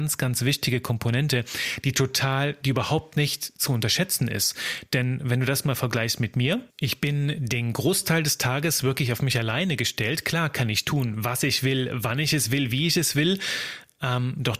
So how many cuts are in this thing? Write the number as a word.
one